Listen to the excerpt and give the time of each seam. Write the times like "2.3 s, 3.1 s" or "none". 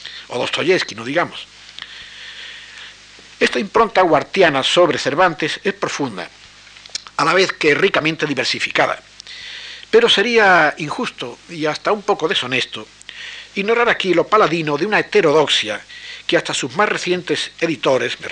none